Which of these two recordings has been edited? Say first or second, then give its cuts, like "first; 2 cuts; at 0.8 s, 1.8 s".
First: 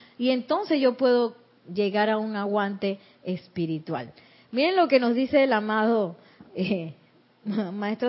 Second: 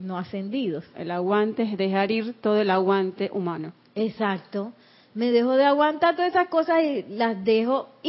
second; 1 cut; at 0.9 s